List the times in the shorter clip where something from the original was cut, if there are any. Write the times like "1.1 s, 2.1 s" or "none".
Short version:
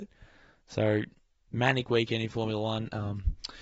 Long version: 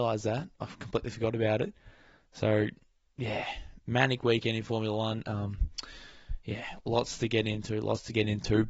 1.5 s